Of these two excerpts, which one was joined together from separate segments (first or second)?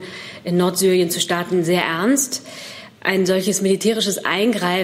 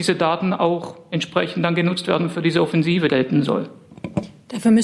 second